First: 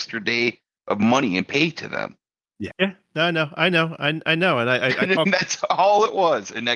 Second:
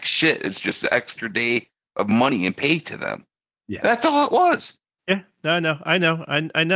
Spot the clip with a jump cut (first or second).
first